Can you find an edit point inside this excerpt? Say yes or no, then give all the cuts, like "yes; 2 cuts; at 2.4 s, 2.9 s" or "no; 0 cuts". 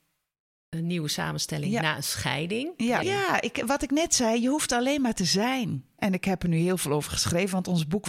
yes; 2 cuts; at 3.0 s, 6.0 s